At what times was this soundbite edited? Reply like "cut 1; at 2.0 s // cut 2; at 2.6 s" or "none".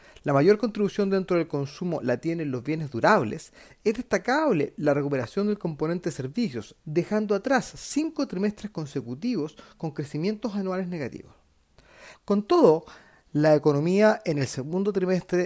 cut 1; at 6.8 s // cut 2; at 12.1 s